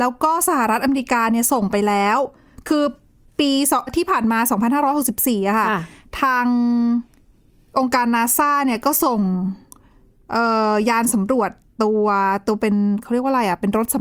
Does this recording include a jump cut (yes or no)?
yes